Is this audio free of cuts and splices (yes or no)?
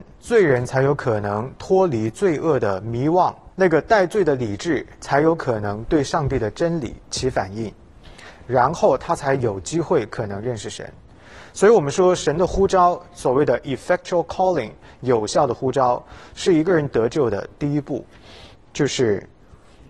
no